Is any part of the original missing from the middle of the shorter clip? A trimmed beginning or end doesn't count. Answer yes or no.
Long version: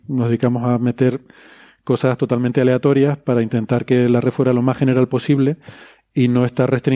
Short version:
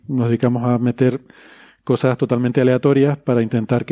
no